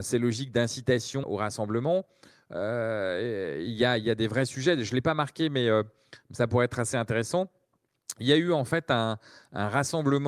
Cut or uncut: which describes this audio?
cut